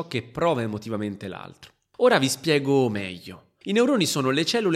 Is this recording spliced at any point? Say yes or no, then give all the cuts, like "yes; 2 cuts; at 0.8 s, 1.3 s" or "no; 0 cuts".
yes; 1 cut; at 3.6 s